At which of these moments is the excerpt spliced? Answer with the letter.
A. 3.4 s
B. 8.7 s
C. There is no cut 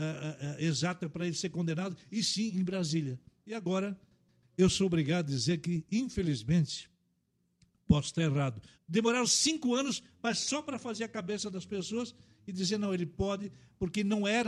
B